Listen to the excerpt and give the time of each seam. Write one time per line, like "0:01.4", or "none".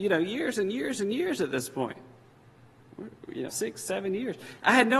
0:03.5

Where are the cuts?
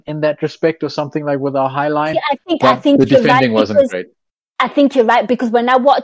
none

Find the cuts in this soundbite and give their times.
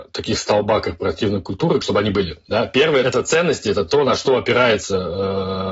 0:01.8

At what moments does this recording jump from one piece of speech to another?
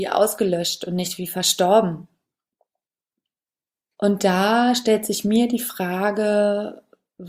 0:03.9

